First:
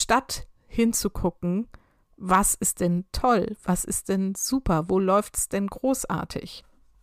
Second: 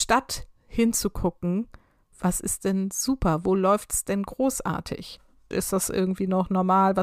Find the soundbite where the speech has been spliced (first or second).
second